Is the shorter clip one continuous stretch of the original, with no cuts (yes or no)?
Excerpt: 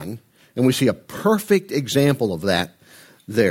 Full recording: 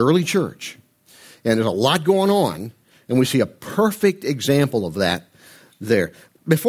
yes